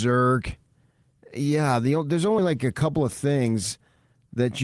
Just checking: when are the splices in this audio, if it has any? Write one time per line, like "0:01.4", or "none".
none